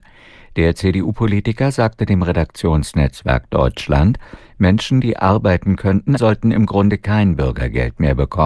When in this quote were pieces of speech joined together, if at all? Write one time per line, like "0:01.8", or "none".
0:06.2